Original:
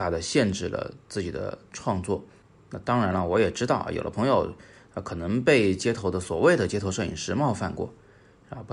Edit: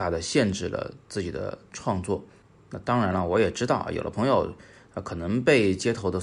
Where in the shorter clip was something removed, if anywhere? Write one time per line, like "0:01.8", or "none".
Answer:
none